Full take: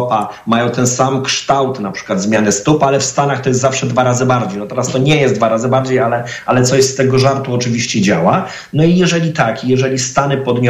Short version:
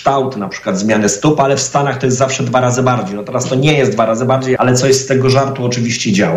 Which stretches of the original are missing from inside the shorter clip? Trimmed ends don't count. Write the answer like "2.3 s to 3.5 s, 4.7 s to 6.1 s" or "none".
6.0 s to 6.4 s